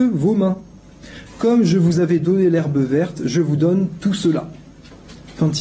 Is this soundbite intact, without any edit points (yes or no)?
no